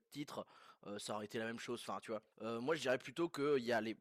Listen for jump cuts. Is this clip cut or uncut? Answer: cut